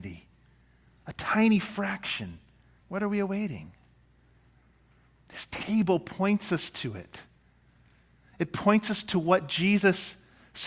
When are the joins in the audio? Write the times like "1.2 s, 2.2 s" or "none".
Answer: 2.8 s